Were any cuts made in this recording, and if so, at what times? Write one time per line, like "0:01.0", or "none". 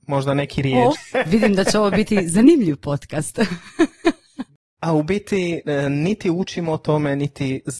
0:00.9